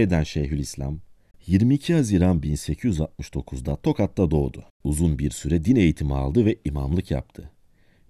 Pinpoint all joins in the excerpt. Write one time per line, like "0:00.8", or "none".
0:01.3
0:04.7